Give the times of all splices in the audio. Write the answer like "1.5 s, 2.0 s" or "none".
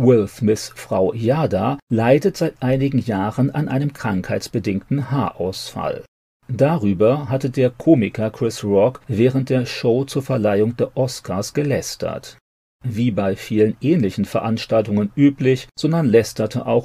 15.7 s